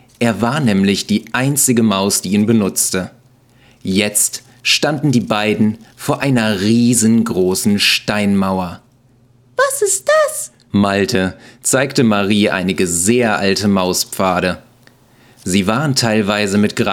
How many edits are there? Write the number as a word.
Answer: one